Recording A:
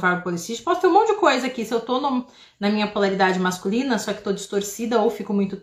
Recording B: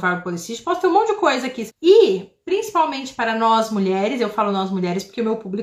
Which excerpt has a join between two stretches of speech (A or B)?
B